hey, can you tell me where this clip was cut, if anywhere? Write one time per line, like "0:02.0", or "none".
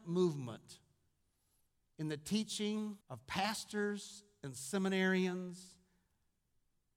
0:03.0